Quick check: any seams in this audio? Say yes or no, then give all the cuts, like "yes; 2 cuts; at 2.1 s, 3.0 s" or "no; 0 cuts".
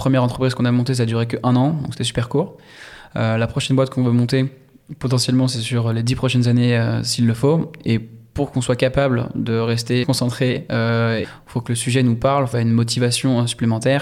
yes; 3 cuts; at 10.0 s, 11.2 s, 12.5 s